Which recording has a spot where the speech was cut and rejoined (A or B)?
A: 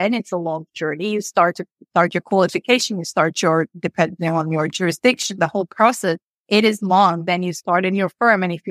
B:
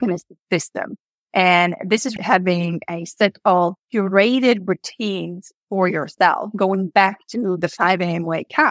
B